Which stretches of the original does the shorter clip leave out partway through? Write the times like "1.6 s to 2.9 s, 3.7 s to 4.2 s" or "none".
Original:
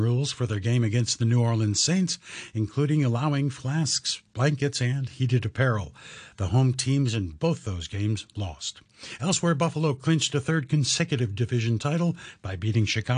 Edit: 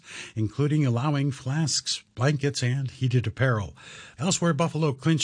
6.4 s to 9.2 s